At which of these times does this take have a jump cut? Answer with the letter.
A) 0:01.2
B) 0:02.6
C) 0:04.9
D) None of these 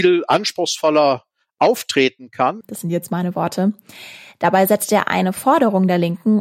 B